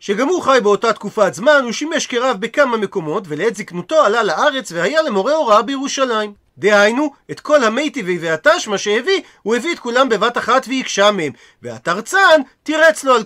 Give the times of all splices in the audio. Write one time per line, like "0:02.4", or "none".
0:06.5